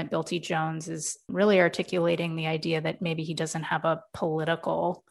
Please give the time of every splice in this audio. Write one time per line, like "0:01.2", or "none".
none